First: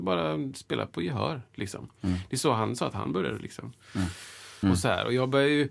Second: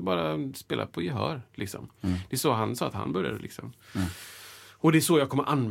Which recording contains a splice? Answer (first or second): first